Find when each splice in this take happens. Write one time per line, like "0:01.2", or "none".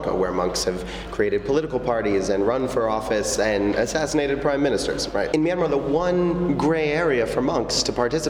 0:05.3